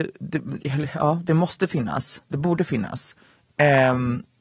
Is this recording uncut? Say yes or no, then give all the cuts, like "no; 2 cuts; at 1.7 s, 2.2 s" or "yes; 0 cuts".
yes; 0 cuts